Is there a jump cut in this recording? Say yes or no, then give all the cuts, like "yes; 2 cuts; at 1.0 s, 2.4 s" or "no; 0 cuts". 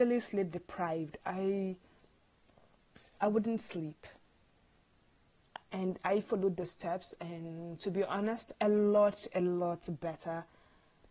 yes; 2 cuts; at 5.6 s, 8.5 s